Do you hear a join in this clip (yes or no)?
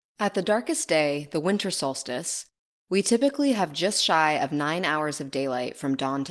no